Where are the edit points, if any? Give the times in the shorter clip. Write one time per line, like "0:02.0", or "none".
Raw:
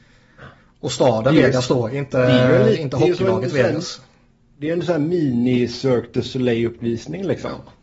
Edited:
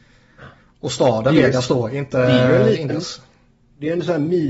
0:02.9